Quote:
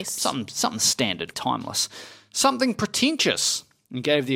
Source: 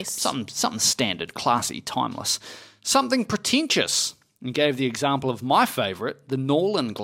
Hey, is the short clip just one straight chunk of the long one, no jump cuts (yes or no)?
no